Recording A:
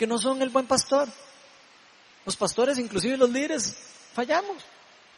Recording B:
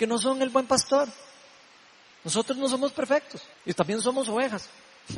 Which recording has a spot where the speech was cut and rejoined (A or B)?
B